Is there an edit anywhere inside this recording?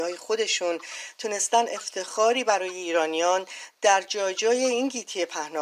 no; 0 cuts

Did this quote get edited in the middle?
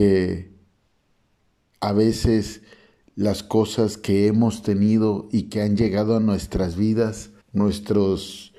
yes; 1 cut; at 7.4 s

